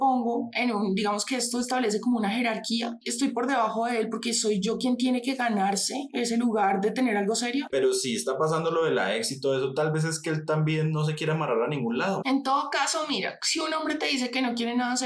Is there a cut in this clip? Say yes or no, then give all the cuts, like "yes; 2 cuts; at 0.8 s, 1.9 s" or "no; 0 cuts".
yes; 2 cuts; at 7.7 s, 12.2 s